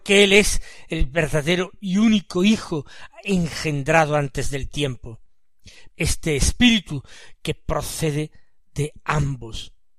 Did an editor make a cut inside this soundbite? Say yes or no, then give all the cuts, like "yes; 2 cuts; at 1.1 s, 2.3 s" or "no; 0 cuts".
yes; 1 cut; at 5.9 s